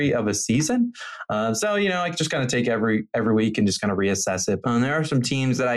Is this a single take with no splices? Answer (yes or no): no